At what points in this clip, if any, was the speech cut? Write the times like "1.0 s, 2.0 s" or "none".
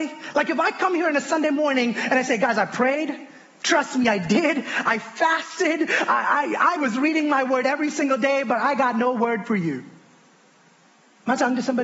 none